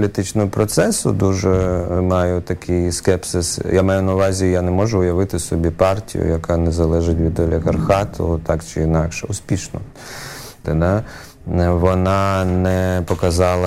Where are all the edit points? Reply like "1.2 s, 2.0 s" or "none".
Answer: 10.6 s